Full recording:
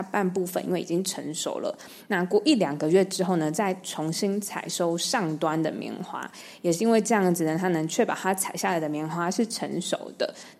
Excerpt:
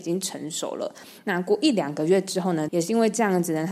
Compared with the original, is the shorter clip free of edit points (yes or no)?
no